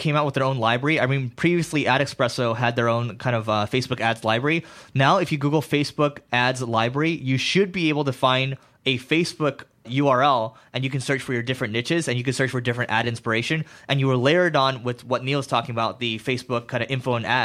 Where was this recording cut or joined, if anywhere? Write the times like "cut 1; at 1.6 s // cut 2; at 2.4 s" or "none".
none